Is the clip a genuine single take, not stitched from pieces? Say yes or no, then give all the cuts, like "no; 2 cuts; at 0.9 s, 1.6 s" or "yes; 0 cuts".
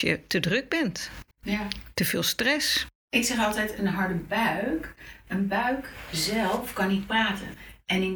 no; 1 cut; at 1.3 s